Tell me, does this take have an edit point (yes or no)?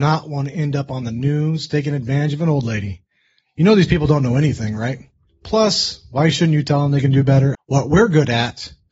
yes